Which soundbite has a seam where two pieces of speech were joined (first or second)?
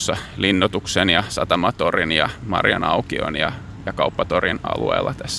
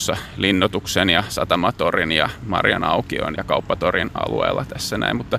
second